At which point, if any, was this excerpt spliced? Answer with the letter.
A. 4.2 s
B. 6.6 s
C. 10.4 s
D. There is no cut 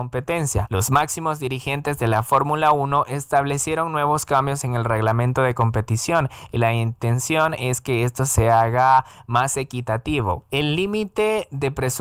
C